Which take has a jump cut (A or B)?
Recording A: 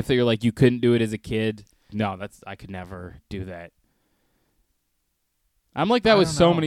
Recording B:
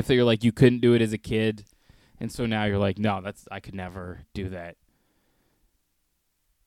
A